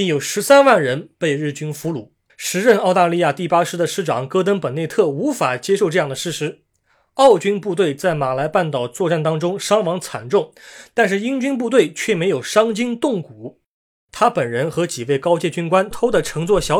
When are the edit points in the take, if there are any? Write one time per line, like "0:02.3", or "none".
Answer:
0:02.3
0:15.9